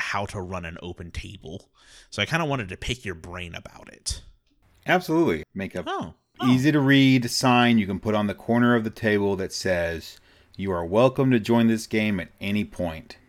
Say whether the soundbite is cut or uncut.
cut